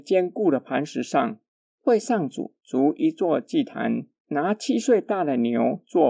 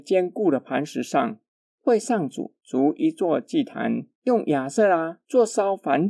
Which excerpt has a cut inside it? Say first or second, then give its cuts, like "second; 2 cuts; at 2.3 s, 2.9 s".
second; 1 cut; at 4.1 s